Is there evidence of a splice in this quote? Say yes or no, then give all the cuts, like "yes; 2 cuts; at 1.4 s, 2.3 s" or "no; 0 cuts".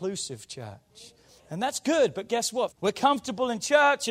yes; 2 cuts; at 1.4 s, 2.7 s